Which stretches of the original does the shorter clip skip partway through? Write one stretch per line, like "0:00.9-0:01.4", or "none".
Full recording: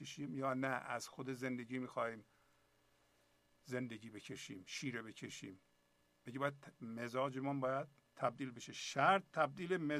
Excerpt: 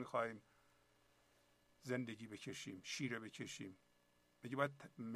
none